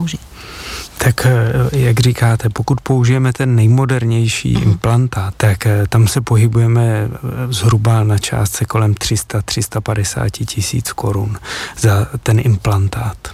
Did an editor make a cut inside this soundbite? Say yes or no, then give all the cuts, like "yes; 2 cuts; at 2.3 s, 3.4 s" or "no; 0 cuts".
yes; 1 cut; at 5.3 s